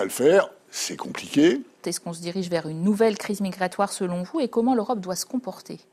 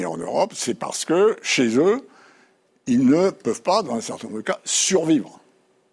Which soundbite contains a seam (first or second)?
first